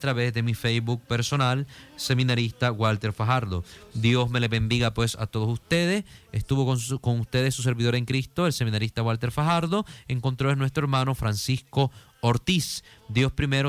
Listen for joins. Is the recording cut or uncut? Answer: uncut